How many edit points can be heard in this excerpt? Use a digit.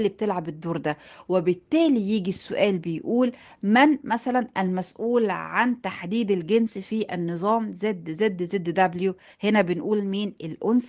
0